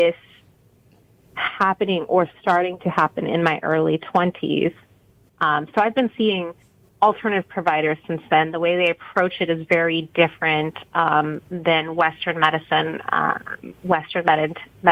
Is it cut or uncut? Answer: uncut